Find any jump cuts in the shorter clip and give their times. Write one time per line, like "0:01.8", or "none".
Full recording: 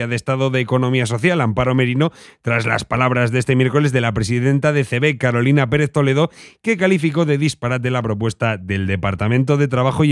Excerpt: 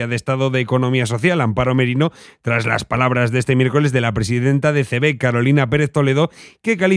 none

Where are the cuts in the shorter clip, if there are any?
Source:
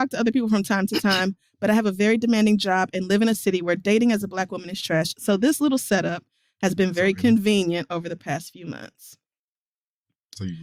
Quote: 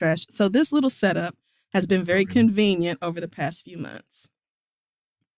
none

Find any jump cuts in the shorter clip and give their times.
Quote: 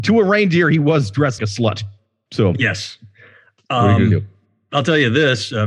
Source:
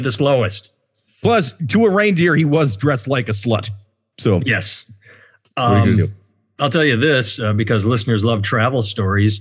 0:01.4

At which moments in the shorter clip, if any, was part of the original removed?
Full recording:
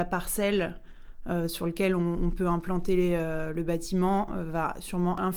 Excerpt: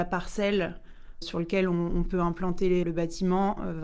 0:01.2
0:02.8

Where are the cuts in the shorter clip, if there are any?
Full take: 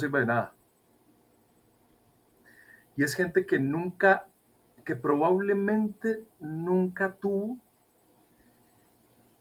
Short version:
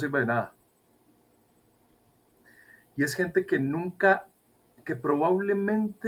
none

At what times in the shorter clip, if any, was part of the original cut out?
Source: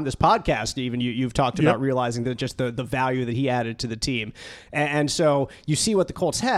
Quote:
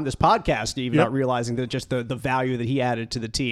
0:00.9

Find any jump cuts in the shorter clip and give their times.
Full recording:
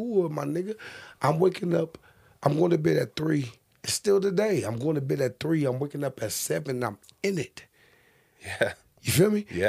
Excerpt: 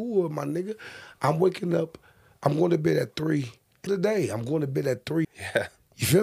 0:03.9
0:05.2

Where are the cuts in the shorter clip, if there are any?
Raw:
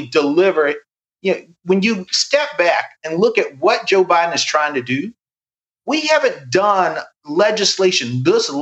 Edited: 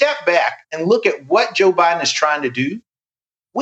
none

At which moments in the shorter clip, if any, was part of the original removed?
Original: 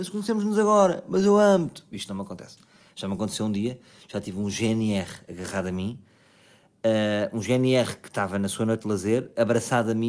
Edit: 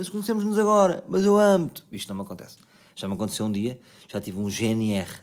none

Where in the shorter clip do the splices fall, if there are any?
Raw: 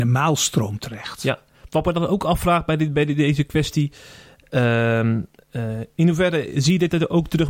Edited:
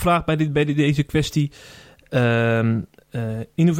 none

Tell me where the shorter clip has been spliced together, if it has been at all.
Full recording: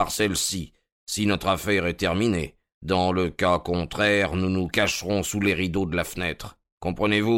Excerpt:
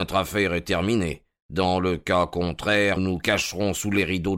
0:03.0

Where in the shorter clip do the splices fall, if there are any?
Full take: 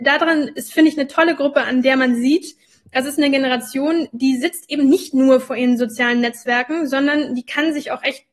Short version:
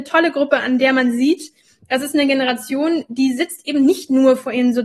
none

